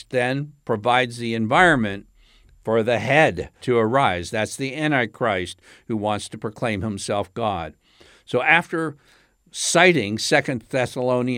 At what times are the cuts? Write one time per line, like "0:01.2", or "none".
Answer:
0:03.6